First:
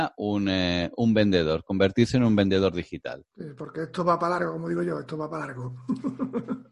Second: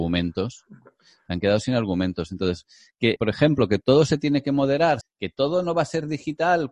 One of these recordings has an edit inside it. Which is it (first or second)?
second